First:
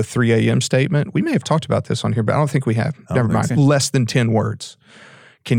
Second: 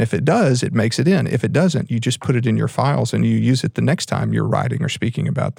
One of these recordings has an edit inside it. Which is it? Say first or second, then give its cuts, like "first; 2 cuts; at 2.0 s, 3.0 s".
first; 1 cut; at 3.5 s